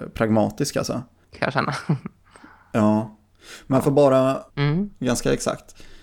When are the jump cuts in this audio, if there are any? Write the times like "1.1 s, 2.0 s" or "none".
1.3 s, 4.5 s